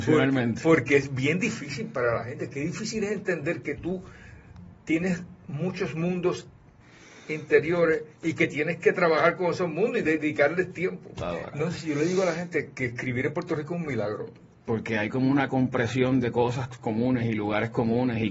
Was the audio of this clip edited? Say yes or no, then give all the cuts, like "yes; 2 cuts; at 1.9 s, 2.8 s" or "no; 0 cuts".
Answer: yes; 2 cuts; at 11.2 s, 14.6 s